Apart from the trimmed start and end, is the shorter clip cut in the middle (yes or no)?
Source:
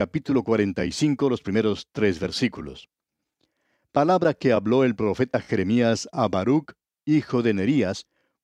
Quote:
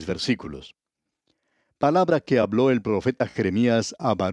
no